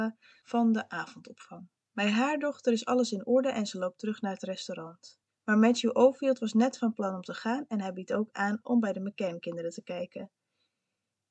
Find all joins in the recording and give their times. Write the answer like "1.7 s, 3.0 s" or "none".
5.3 s